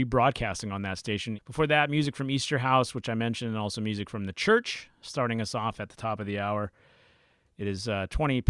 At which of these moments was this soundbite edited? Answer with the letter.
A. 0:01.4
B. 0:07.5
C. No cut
A